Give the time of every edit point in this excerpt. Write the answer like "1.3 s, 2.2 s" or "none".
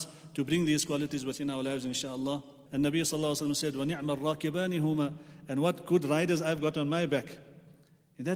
2.7 s